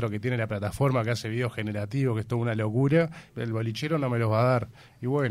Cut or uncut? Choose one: cut